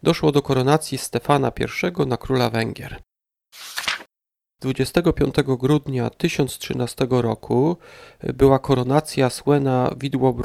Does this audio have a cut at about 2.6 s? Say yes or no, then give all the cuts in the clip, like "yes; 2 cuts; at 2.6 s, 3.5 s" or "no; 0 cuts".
no; 1 cut; at 4.5 s